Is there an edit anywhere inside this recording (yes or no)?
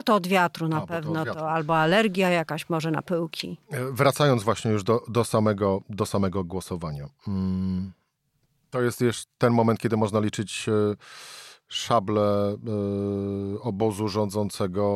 no